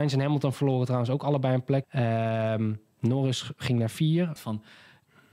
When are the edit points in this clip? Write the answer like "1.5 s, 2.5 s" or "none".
1.8 s, 4.4 s